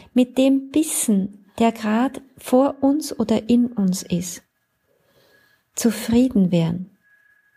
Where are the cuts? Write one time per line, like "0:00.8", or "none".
none